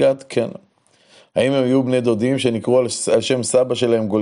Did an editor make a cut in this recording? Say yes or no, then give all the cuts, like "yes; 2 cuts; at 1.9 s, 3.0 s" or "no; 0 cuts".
no; 0 cuts